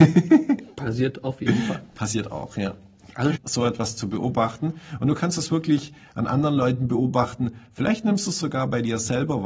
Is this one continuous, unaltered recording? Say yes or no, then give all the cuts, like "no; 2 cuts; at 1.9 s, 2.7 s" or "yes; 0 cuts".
no; 1 cut; at 3.4 s